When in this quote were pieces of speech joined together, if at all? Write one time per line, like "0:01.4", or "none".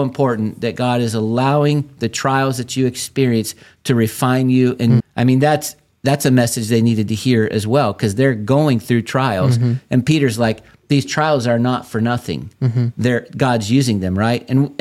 0:05.0